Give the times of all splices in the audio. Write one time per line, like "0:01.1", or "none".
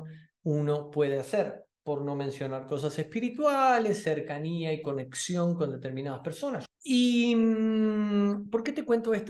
0:06.7